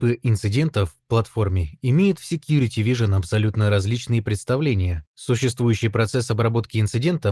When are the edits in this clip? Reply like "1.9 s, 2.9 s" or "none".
5.1 s